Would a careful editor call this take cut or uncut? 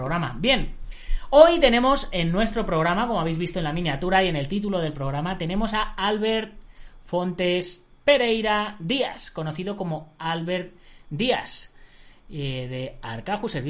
uncut